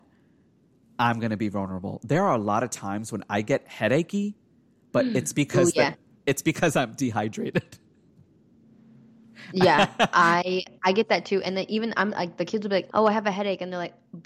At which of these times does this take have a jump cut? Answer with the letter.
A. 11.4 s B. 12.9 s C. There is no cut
B